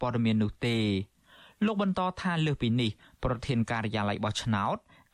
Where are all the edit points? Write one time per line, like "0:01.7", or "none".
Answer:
none